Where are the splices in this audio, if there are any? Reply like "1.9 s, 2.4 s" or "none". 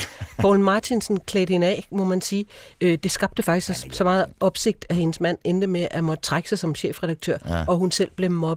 none